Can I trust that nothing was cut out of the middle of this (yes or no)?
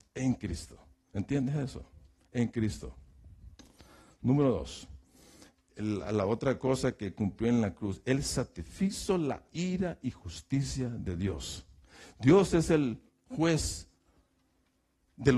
yes